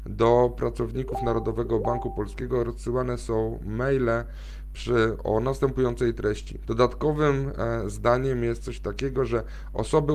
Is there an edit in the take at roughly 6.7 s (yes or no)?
yes